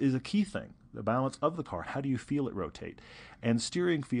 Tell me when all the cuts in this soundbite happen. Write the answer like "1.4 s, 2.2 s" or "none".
1.8 s